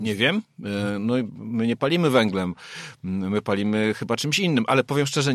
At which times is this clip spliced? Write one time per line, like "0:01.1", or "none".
0:01.3